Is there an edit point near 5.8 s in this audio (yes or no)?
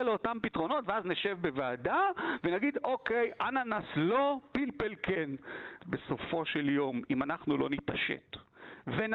yes